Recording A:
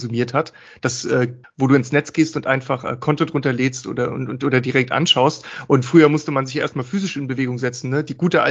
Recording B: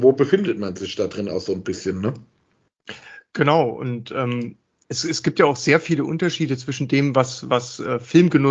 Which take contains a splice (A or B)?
A